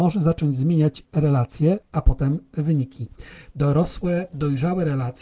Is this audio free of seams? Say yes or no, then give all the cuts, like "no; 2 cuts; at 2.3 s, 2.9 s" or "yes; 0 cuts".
no; 2 cuts; at 1.8 s, 3.5 s